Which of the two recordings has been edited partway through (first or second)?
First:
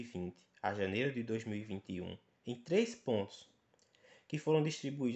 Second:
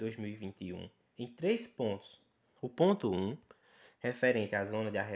second